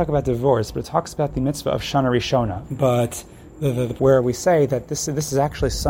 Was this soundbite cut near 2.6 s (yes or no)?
yes